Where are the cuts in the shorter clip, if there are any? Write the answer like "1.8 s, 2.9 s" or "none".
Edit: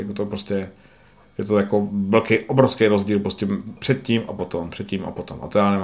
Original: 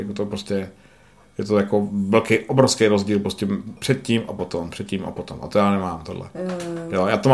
none